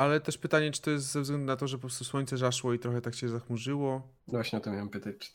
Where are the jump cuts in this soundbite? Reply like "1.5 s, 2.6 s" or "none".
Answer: 4.2 s